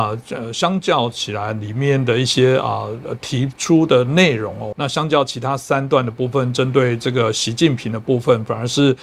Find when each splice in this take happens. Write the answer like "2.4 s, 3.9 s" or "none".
4.7 s